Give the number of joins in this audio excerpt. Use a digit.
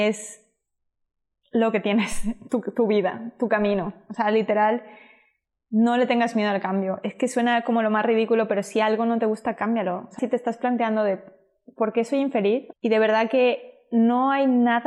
2